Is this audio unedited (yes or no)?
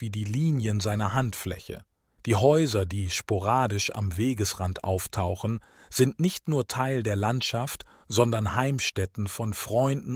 yes